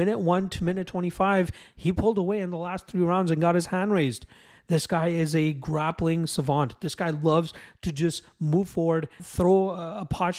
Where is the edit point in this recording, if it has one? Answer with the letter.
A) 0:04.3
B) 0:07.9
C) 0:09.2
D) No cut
C